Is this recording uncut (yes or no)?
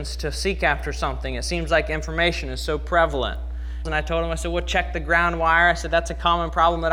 no